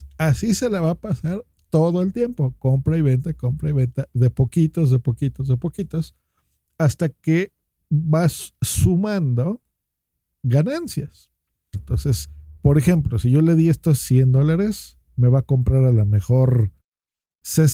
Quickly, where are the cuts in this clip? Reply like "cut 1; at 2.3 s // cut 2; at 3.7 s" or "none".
cut 1; at 11.7 s